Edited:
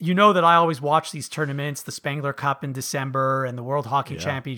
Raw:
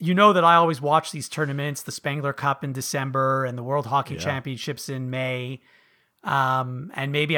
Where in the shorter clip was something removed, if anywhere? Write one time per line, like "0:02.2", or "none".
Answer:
none